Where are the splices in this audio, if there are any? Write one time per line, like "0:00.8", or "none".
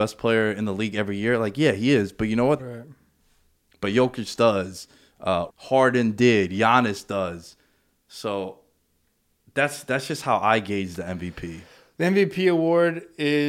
0:02.6
0:05.5